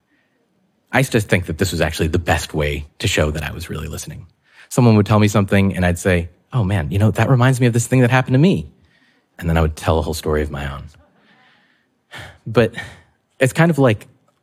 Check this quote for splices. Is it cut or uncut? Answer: uncut